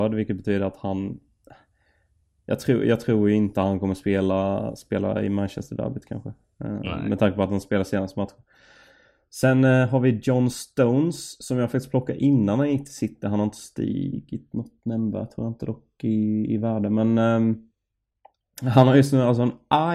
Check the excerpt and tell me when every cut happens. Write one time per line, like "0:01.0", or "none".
none